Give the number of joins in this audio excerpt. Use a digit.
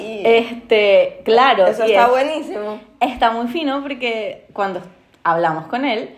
0